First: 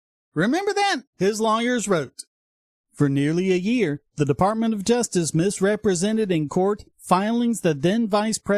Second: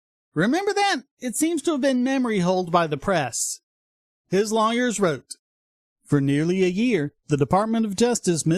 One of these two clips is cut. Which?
first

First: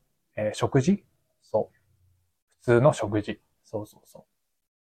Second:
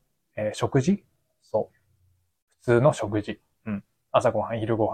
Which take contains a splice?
first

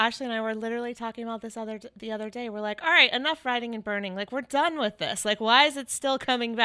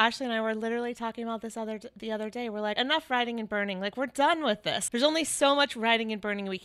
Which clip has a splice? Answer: second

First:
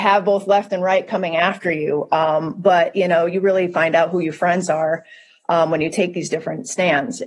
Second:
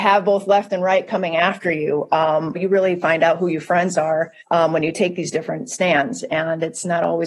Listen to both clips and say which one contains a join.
second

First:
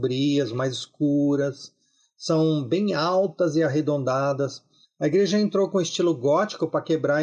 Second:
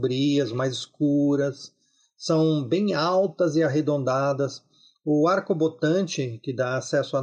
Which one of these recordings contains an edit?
first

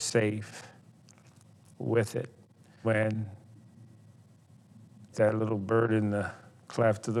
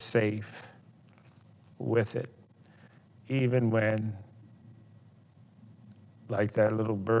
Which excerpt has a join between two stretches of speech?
first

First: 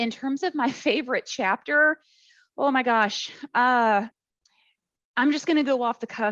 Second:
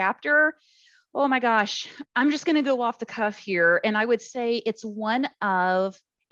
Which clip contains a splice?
second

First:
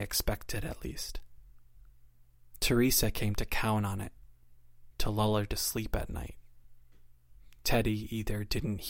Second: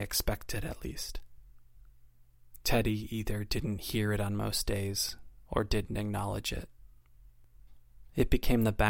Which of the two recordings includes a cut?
second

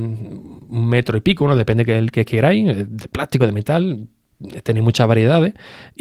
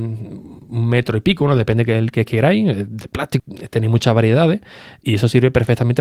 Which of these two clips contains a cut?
second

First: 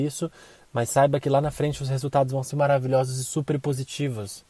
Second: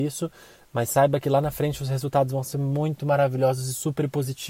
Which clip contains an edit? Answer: first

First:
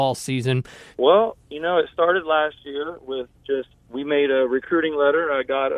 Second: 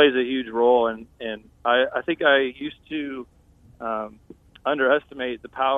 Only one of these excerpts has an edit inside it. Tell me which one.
first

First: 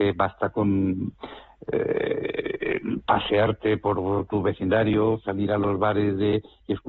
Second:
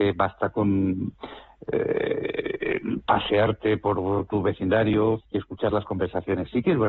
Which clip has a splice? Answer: second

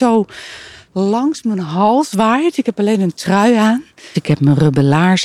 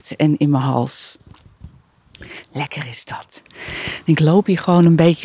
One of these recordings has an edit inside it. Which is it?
first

